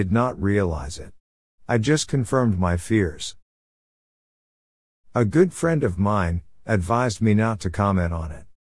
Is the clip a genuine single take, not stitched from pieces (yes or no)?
yes